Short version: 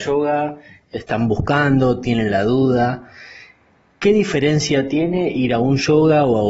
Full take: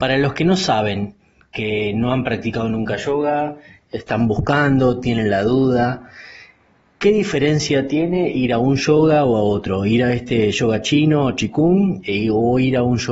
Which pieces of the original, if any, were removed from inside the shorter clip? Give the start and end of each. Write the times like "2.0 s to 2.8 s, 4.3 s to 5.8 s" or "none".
none